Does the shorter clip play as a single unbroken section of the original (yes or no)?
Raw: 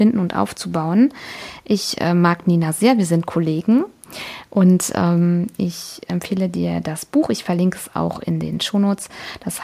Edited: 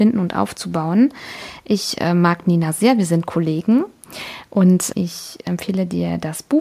no